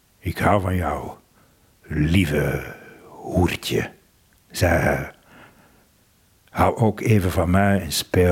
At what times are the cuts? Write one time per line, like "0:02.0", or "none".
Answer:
0:01.7